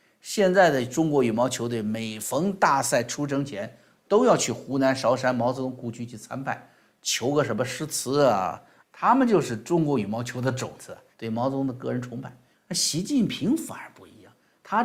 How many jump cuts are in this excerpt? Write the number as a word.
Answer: three